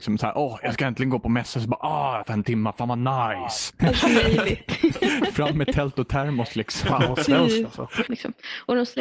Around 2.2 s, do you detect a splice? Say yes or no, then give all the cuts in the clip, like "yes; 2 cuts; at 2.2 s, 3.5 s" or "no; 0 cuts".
yes; 3 cuts; at 2.2 s, 3.8 s, 8.1 s